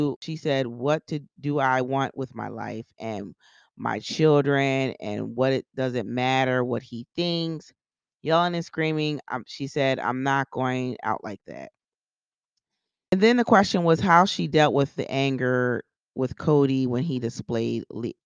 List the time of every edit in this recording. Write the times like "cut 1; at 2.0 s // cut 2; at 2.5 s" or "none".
cut 1; at 13.1 s // cut 2; at 15.0 s